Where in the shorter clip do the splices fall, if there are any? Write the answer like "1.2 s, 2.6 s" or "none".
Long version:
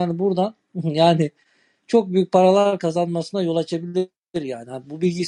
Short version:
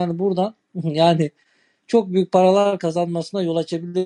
none